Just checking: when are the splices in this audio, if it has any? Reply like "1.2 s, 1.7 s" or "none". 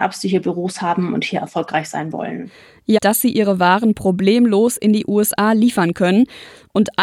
3.0 s